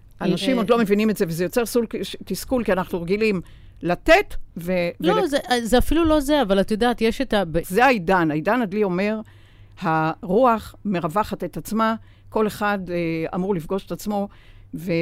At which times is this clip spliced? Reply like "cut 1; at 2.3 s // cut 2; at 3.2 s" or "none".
cut 1; at 7.6 s